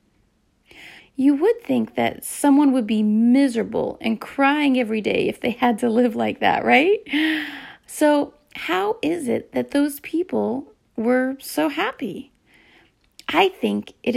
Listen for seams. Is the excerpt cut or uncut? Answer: cut